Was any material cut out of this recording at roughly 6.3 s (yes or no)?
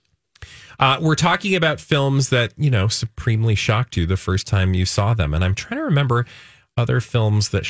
no